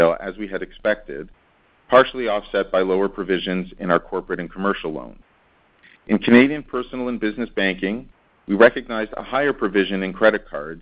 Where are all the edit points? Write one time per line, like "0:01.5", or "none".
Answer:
none